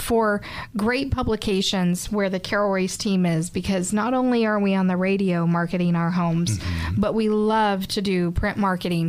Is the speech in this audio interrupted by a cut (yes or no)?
no